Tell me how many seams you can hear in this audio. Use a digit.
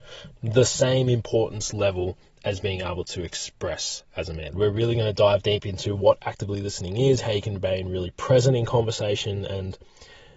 1